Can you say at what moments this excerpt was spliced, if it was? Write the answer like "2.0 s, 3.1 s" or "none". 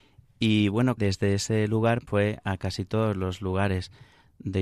1.0 s, 2.1 s